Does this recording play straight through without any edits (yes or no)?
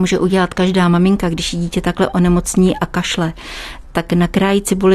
yes